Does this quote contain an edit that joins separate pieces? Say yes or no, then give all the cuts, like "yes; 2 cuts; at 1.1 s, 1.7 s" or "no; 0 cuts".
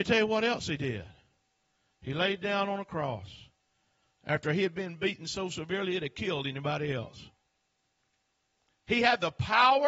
no; 0 cuts